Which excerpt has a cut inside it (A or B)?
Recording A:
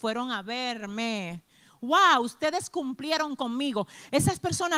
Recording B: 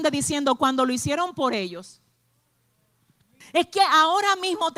B